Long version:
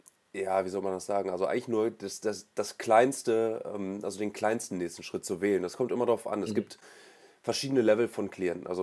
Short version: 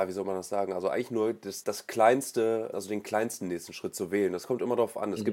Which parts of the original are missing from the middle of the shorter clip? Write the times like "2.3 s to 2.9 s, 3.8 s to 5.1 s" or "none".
2.2 s to 2.5 s, 3.6 s to 4.0 s